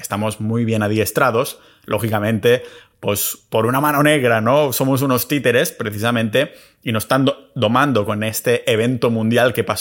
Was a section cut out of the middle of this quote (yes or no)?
no